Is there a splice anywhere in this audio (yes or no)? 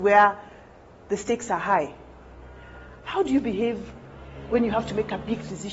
no